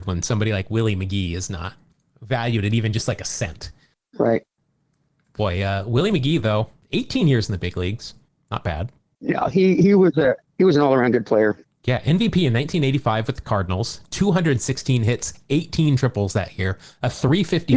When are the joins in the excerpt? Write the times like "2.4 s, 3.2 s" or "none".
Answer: none